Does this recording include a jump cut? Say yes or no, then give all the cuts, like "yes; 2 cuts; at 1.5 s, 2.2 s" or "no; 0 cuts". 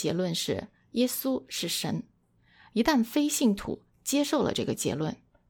no; 0 cuts